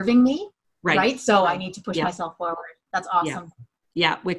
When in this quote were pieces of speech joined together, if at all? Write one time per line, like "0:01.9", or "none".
none